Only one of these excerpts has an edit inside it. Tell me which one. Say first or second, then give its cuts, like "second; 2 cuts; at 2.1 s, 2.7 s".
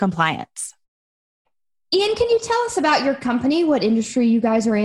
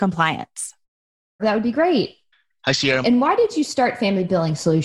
second; 2 cuts; at 1.4 s, 3.0 s